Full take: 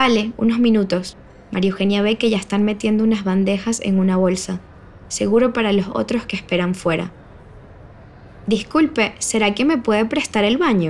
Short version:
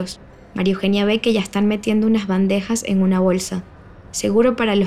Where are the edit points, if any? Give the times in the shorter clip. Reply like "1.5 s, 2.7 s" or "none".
none